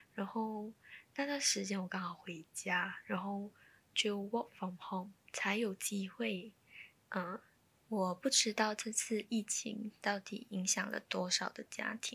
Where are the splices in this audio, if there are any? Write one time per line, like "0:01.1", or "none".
0:05.2
0:07.7